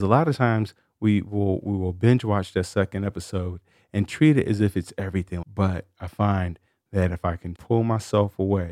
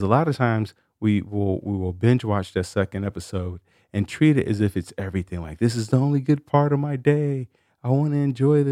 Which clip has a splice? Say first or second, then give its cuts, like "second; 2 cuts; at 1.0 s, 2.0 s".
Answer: first; 2 cuts; at 5.4 s, 7.6 s